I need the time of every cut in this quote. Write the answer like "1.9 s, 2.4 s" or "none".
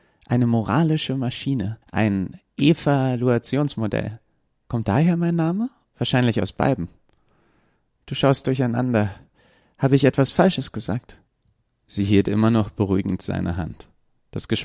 1.8 s, 5.9 s